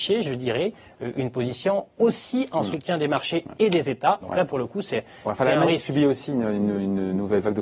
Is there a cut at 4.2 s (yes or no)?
yes